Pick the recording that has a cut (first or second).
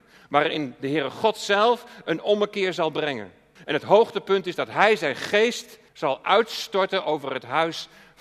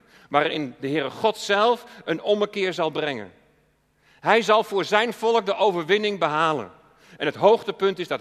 first